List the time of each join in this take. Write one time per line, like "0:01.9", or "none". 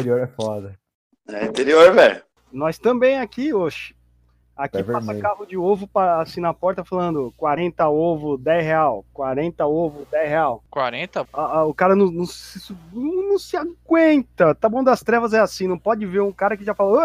0:11.2